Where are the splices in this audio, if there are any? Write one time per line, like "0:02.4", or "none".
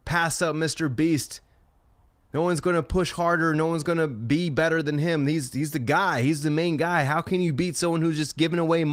none